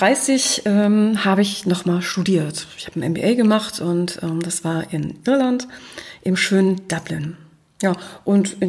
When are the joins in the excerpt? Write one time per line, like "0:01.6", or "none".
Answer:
none